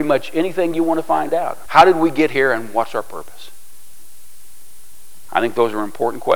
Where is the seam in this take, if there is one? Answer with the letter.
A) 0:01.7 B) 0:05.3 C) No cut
A